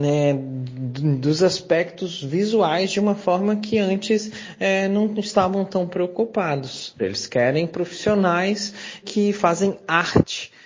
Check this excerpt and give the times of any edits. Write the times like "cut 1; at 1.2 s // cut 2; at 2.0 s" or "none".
cut 1; at 7.0 s // cut 2; at 9.0 s